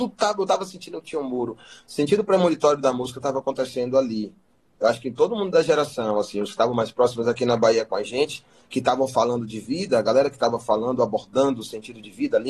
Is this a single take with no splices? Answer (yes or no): yes